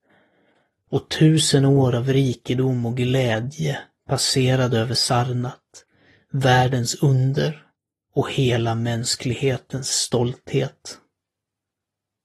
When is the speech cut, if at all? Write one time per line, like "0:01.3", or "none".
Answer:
none